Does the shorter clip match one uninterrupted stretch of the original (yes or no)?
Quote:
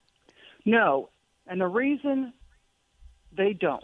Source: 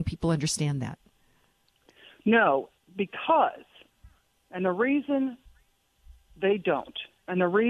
no